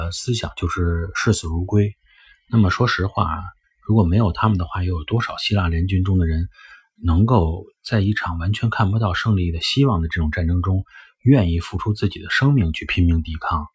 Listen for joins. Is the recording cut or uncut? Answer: uncut